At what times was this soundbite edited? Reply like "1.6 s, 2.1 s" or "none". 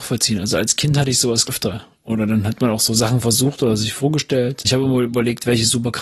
1.5 s